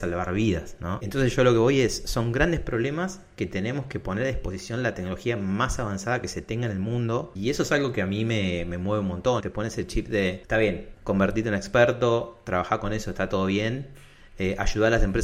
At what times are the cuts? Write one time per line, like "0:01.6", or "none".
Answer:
0:09.4
0:10.9